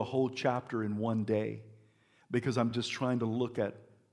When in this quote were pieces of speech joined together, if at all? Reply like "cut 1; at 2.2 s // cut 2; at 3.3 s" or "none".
none